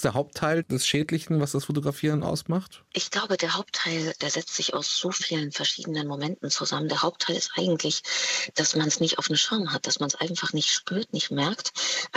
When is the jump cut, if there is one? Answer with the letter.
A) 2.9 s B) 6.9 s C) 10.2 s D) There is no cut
A